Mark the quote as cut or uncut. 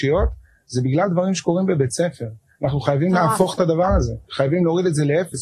cut